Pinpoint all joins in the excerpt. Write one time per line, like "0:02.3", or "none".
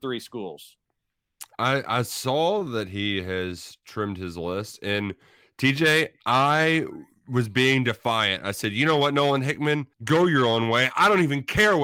0:09.9